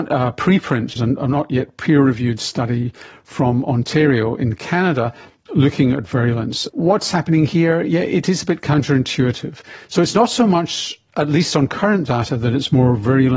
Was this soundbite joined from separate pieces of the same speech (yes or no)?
yes